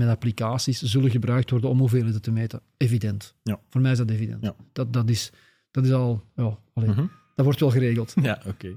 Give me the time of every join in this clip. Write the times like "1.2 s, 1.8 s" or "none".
none